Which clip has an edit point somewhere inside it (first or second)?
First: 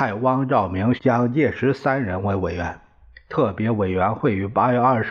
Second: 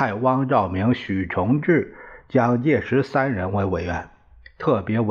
first